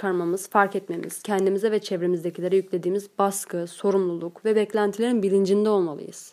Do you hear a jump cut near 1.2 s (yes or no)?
no